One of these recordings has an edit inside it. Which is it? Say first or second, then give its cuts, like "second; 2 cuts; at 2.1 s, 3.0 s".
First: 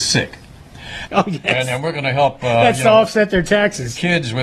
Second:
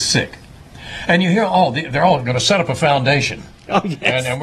first; 1 cut; at 1.1 s